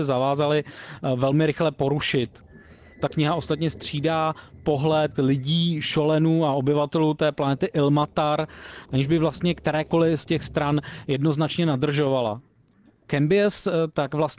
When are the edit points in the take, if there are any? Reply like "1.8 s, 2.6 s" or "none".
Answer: none